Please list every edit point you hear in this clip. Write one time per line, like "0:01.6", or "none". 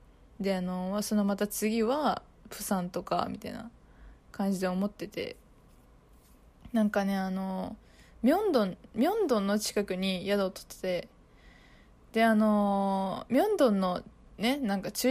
none